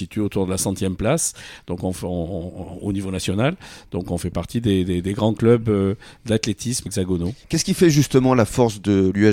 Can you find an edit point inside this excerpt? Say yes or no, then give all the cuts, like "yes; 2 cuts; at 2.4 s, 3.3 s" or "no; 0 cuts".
yes; 1 cut; at 6.9 s